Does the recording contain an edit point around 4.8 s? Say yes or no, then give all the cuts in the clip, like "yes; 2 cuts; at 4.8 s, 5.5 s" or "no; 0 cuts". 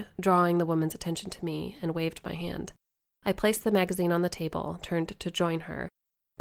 yes; 1 cut; at 4.8 s